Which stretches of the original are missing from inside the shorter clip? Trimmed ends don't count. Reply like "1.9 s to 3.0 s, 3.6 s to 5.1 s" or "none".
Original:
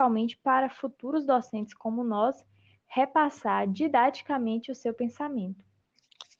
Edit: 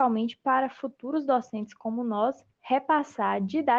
2.5 s to 2.8 s